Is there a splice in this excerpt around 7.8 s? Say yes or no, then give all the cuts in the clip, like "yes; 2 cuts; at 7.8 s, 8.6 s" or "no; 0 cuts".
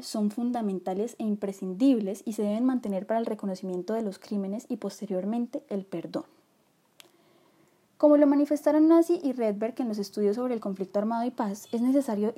yes; 1 cut; at 7.8 s